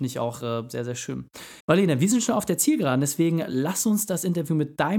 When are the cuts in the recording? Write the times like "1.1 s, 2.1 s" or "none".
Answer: 1.6 s